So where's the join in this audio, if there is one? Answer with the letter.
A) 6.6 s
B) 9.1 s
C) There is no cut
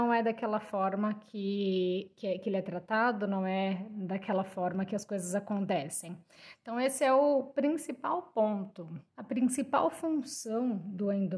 B